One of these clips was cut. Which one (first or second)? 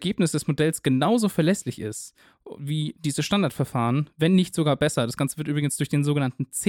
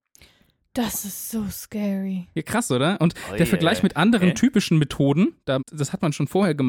second